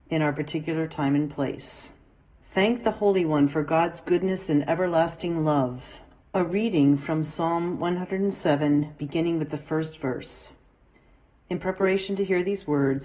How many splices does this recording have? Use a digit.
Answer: 2